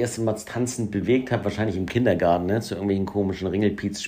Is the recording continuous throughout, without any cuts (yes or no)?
yes